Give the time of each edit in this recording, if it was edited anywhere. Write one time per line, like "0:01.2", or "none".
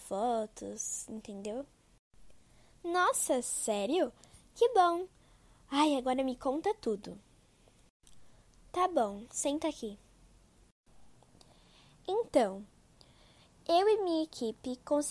none